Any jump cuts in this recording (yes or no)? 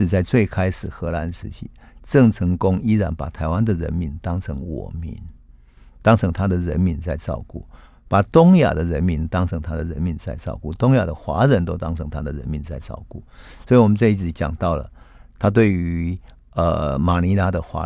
no